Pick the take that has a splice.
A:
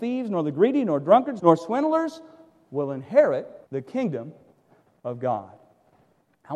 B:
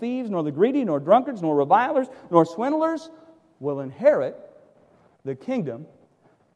A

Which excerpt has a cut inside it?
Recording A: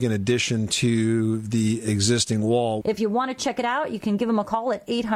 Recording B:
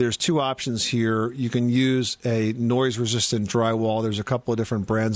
A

